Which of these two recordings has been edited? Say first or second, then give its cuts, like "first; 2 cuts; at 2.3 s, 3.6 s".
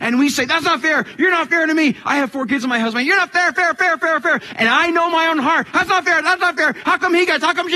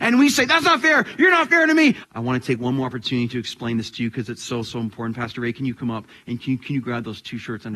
second; 1 cut; at 2.0 s